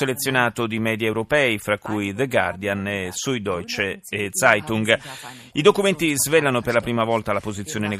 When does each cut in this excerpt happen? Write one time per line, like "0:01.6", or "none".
none

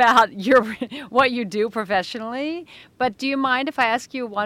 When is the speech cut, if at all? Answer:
none

